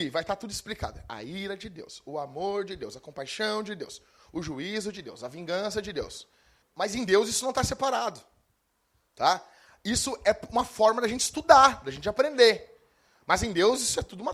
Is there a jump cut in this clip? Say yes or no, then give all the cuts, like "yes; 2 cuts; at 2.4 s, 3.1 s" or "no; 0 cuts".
yes; 1 cut; at 6.6 s